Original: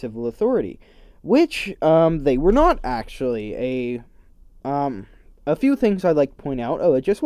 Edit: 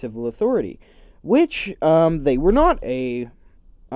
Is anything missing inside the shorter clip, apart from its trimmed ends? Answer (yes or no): yes